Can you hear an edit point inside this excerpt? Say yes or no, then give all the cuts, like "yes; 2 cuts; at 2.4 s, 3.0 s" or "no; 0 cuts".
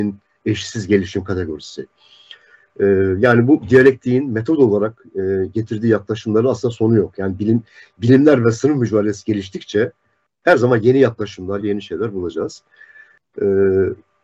yes; 1 cut; at 11.6 s